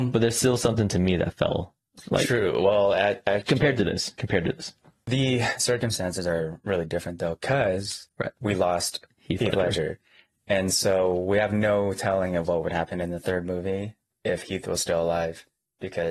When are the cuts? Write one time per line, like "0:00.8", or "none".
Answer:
none